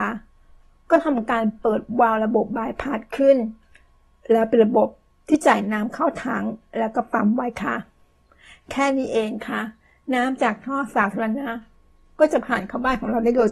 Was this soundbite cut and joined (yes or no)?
no